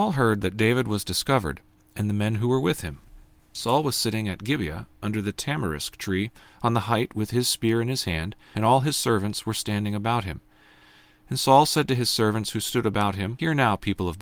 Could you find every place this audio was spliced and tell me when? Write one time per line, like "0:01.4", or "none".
none